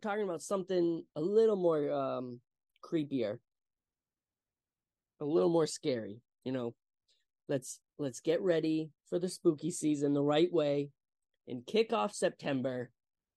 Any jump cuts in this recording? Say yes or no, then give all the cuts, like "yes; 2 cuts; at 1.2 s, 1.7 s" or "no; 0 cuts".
yes; 2 cuts; at 7.8 s, 9.0 s